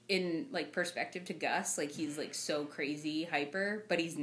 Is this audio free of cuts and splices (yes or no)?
yes